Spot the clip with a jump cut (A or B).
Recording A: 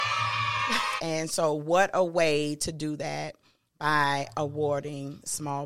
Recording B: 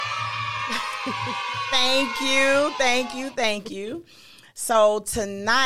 A